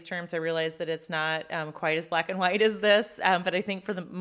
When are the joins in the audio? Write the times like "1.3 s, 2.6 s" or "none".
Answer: none